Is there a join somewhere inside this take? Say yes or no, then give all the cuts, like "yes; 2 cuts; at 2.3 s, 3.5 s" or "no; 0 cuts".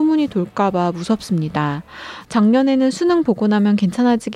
yes; 1 cut; at 2.2 s